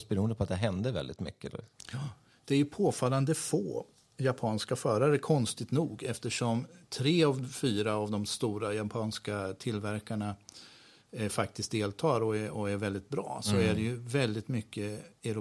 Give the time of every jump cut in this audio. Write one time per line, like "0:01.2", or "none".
none